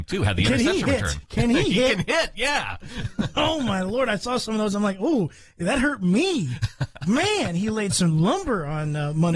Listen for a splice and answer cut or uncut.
uncut